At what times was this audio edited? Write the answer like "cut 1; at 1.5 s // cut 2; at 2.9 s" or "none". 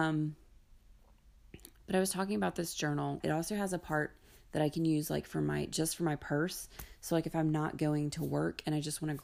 cut 1; at 3.2 s